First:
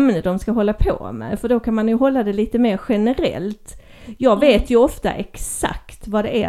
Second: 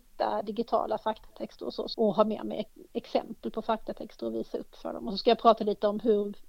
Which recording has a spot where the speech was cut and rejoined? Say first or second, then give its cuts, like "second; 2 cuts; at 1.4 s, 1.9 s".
second; 1 cut; at 1.9 s